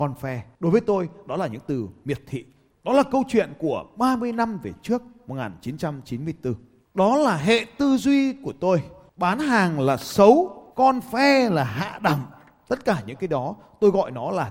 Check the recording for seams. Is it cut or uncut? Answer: cut